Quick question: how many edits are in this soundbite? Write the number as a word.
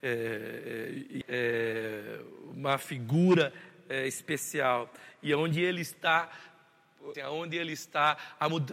two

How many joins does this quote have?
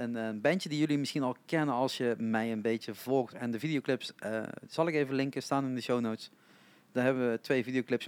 one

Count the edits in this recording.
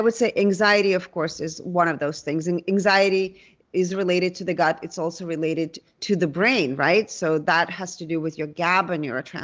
zero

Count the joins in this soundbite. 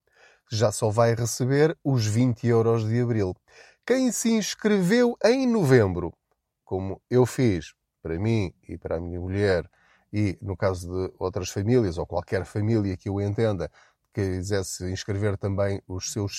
zero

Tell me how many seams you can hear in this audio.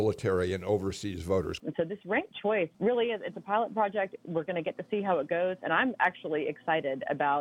two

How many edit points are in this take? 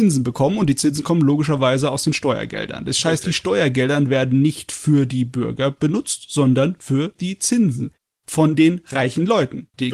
zero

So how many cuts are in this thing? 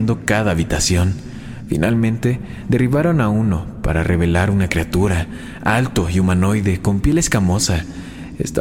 zero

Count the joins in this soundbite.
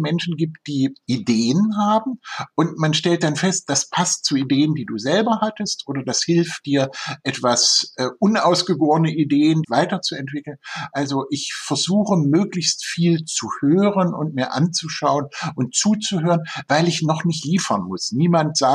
one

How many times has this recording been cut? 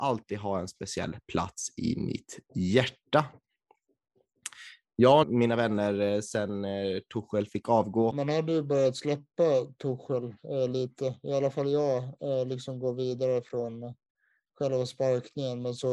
two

